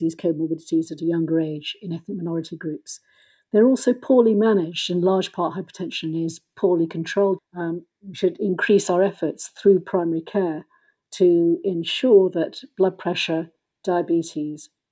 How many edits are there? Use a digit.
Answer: 1